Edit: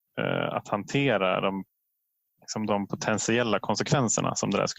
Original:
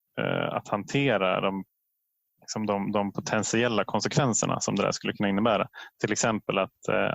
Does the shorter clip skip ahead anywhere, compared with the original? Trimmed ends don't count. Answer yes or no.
yes